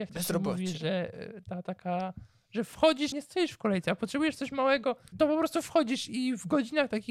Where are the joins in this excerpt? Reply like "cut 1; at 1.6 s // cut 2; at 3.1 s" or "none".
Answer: cut 1; at 3.1 s // cut 2; at 5.1 s